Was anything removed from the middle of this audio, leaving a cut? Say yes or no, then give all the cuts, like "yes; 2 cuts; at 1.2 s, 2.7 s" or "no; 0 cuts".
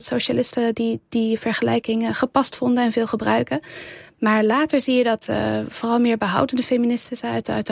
no; 0 cuts